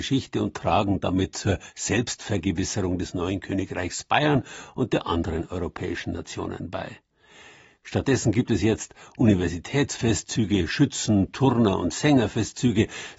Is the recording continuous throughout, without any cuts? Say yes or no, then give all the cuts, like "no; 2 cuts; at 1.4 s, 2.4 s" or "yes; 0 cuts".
no; 1 cut; at 7.7 s